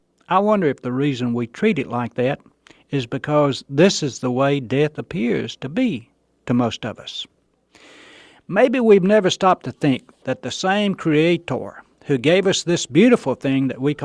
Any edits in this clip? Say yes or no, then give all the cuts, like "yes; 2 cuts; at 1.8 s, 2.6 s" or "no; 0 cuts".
no; 0 cuts